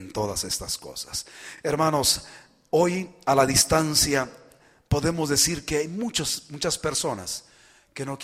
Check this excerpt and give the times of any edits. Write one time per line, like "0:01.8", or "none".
none